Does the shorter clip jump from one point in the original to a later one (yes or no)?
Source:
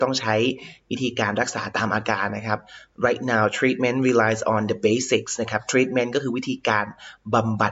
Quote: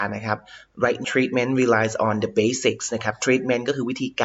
yes